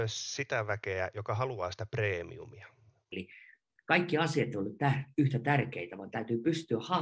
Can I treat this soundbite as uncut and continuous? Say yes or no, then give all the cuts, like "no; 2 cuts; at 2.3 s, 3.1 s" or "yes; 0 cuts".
no; 1 cut; at 3.1 s